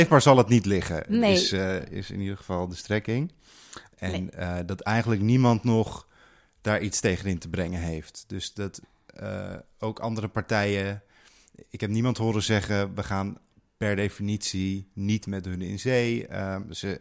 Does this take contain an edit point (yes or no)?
yes